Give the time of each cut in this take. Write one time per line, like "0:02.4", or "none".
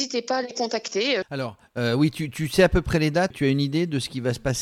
0:01.2
0:03.3

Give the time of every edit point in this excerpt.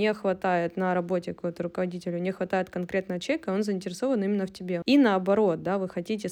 0:04.8

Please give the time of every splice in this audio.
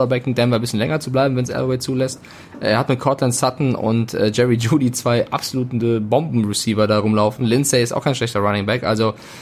none

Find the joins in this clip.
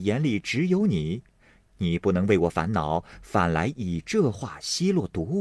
none

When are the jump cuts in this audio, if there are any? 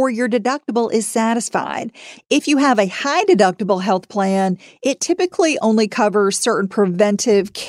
0:02.2

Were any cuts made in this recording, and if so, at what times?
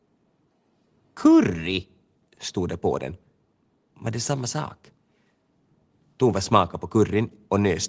none

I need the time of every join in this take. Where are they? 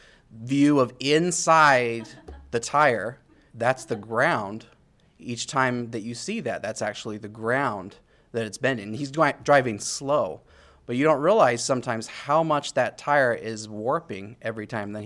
0:03.5

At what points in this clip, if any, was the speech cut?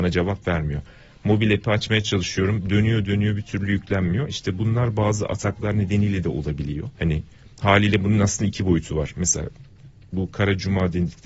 0:03.0
0:06.9

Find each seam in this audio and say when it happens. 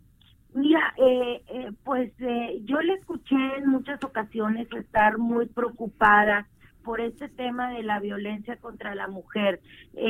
0:00.9
0:06.8

